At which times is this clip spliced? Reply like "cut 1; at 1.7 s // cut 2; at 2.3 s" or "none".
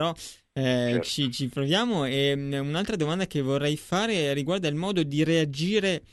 none